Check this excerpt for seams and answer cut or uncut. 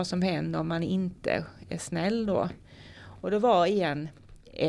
uncut